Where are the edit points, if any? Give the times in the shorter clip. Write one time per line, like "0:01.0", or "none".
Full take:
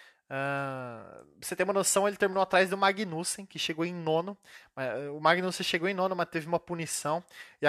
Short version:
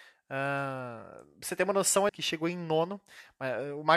0:02.1